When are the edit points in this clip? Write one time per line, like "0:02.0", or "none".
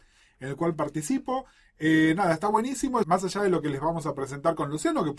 0:03.0